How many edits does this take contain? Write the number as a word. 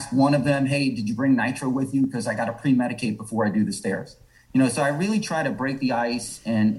zero